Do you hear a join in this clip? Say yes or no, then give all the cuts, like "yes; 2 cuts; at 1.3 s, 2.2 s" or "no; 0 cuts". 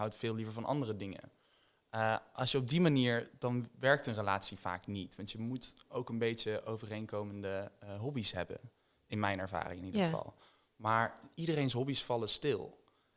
no; 0 cuts